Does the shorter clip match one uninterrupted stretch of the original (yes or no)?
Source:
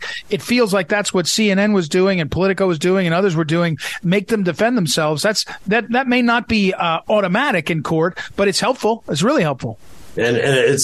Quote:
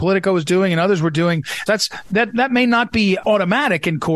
no